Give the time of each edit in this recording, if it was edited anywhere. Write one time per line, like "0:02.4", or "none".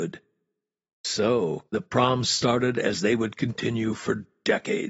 0:01.7